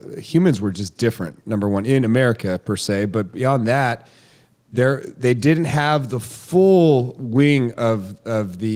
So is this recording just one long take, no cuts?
yes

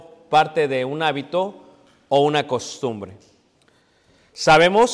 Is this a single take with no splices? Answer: yes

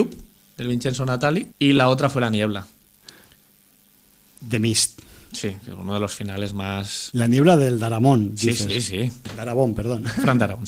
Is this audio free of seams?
no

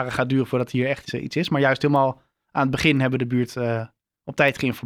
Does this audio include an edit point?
yes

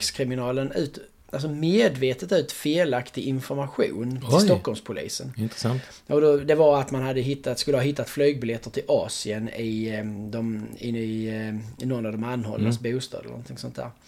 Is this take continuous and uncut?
yes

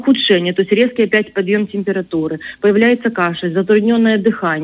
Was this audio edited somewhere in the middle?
no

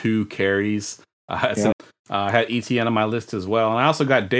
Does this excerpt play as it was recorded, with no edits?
no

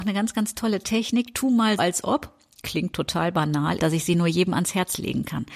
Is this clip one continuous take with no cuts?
no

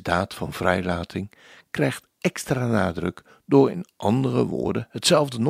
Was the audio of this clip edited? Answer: no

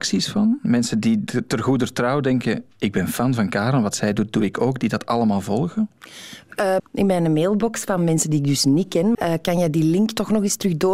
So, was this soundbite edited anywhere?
yes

